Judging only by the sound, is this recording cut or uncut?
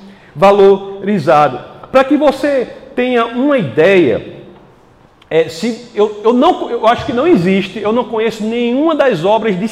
uncut